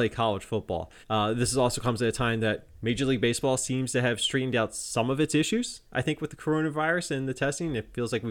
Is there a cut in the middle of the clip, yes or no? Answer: yes